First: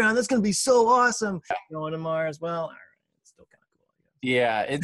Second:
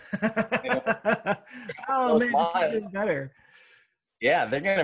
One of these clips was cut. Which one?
first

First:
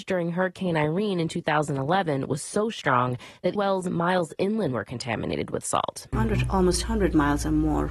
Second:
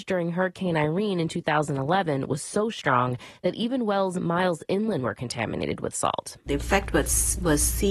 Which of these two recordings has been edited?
first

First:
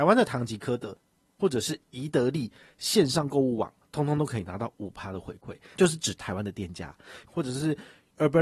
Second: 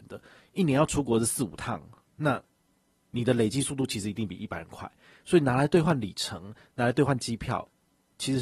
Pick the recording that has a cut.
first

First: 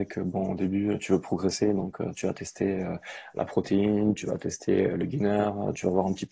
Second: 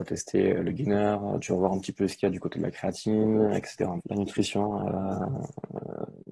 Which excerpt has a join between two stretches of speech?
second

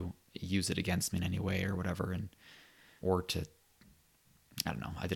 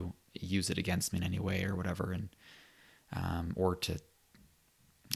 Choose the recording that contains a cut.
first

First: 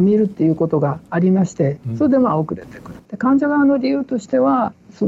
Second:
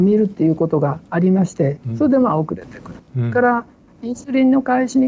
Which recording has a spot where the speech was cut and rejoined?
first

